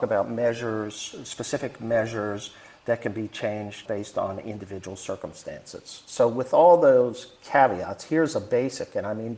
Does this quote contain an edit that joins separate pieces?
yes; 1 cut; at 3.8 s

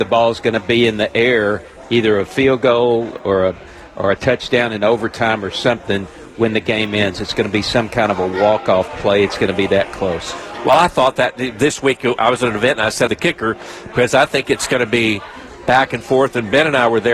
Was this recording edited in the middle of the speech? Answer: yes; 1 cut; at 13.1 s

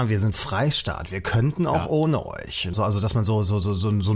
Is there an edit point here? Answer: yes; 1 cut; at 2.7 s

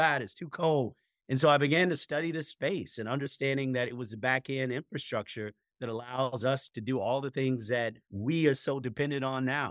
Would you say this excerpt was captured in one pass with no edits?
yes; 0 cuts

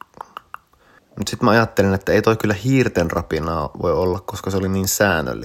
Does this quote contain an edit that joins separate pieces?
yes; 1 cut; at 1.0 s

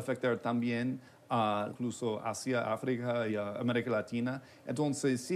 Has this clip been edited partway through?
yes; 2 cuts; at 1.7 s, 3.3 s

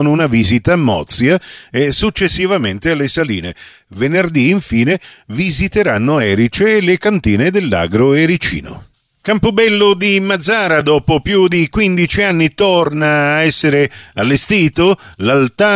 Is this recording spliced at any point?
no; 0 cuts

